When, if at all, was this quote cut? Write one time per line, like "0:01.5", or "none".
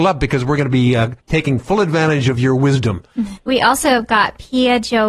0:01.2
0:03.4